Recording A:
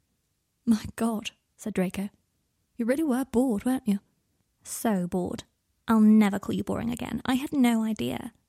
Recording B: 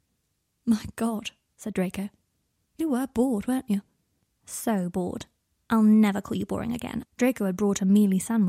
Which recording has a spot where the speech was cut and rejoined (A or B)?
B